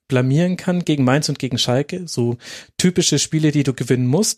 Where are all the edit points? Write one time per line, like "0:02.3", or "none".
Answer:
none